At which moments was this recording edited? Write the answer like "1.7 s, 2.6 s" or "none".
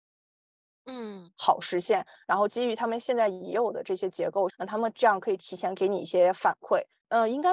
1.4 s, 4.5 s